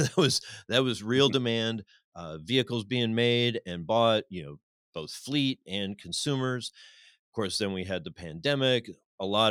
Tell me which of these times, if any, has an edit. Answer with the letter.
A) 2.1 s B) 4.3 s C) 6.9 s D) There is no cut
D